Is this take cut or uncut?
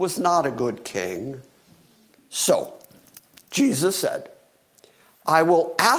cut